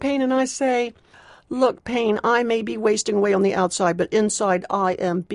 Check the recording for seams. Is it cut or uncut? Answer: uncut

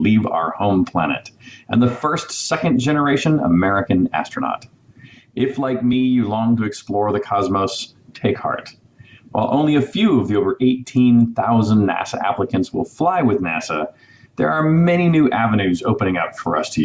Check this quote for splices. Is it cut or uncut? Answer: uncut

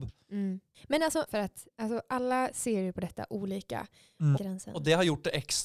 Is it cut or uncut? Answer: cut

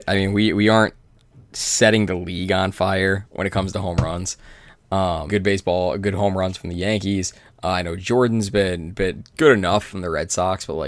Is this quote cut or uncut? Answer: cut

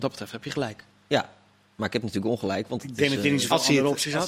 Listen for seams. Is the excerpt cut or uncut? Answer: uncut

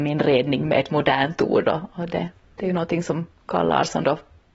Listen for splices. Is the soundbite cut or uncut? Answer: uncut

